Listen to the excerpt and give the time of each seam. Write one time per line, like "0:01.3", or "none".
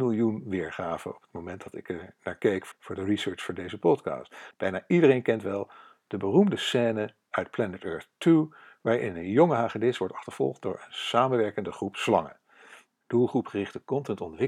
0:02.7
0:04.5
0:12.9

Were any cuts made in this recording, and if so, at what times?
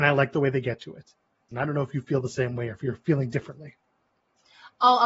0:01.5

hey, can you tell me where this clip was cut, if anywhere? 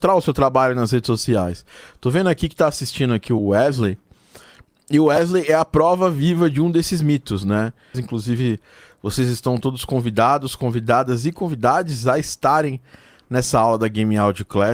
0:03.4
0:07.9

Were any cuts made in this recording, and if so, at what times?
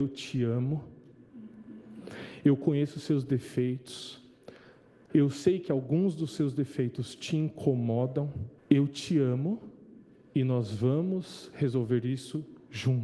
0:05.1
0:08.6

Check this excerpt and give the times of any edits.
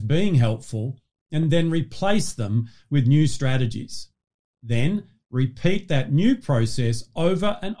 none

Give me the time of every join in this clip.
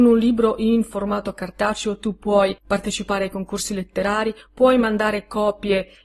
0:02.6

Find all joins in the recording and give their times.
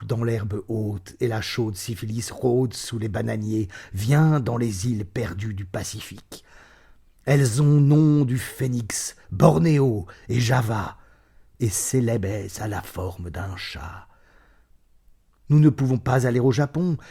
0:09.2

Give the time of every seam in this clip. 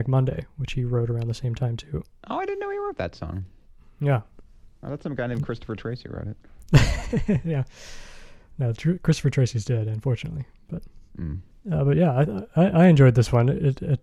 none

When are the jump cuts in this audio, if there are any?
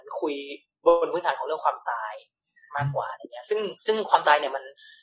0:03.8

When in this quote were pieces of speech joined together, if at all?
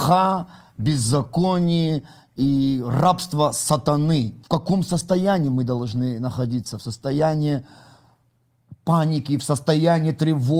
0:04.4

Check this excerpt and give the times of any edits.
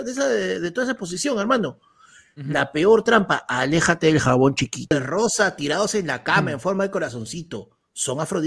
0:04.9

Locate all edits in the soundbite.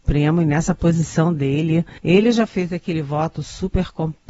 0:02.0

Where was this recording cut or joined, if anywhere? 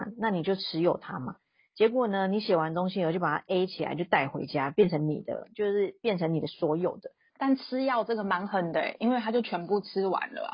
0:07.3

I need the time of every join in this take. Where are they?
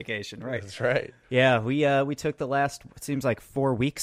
0:01.2

